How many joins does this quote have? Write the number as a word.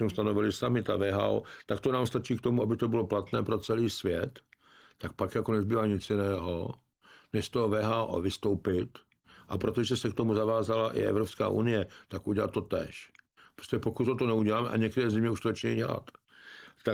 zero